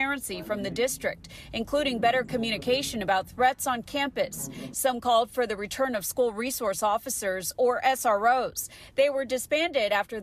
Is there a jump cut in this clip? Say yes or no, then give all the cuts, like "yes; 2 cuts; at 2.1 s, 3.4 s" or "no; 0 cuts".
no; 0 cuts